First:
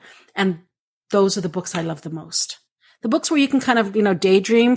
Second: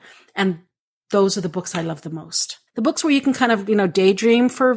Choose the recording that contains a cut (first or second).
second